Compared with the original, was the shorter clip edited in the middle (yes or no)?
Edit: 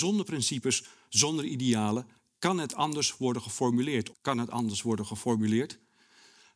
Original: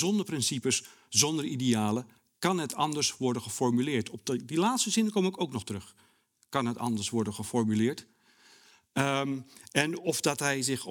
yes